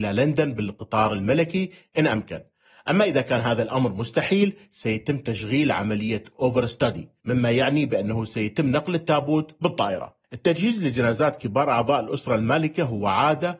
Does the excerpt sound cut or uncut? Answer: cut